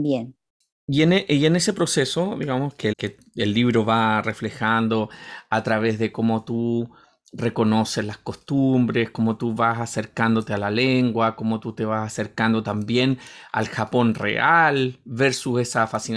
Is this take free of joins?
no; 1 cut; at 2.9 s

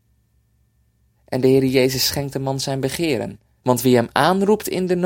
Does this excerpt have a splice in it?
yes; 1 cut; at 3.6 s

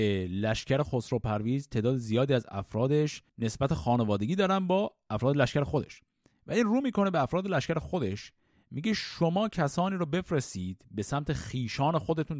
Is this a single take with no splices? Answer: no; 1 cut; at 3.3 s

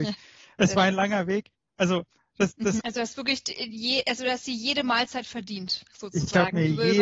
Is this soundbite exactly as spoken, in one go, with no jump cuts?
no; 1 cut; at 2.8 s

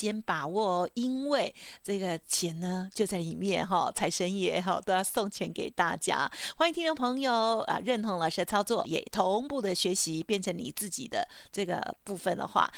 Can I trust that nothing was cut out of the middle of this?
no; 1 cut; at 8.8 s

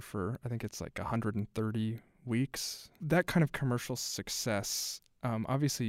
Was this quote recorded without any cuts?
yes; 0 cuts

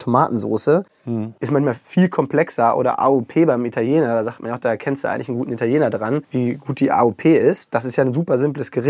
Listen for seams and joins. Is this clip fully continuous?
yes; 0 cuts

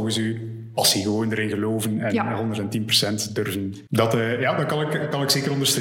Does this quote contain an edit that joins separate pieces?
yes; 1 cut; at 3.9 s

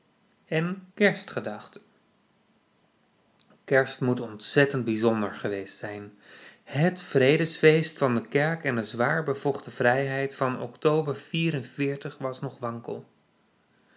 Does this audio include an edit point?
yes; 1 cut; at 0.9 s

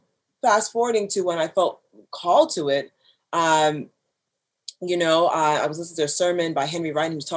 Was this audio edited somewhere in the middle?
no; 0 cuts

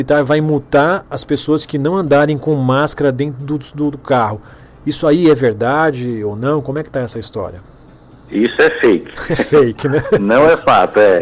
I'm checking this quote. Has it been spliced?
no; 0 cuts

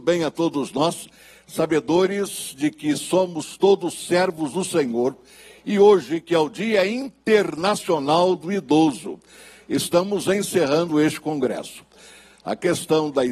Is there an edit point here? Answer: no; 0 cuts

